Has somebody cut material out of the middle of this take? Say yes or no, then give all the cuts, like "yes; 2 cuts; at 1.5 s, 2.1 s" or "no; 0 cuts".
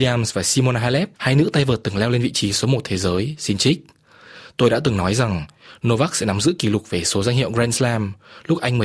yes; 1 cut; at 1.1 s